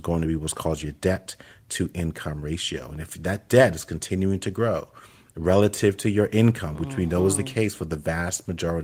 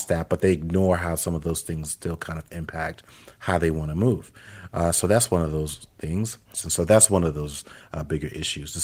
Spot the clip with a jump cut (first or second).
second